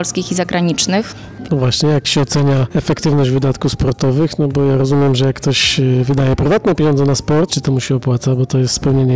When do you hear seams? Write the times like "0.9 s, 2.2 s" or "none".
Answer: 1.5 s, 7.5 s